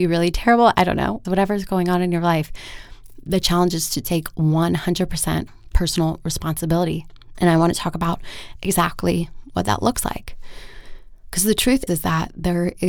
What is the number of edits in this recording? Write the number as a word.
three